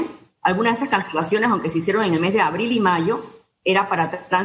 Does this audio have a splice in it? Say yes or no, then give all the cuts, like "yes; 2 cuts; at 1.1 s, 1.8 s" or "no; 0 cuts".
no; 0 cuts